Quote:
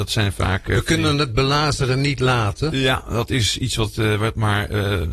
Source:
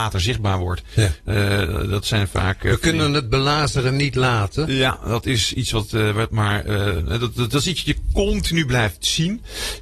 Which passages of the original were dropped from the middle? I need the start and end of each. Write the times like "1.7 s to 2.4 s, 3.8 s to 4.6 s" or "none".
none